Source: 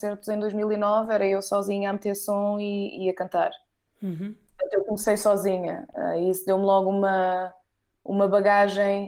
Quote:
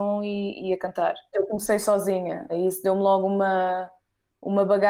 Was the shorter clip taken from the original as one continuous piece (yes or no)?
no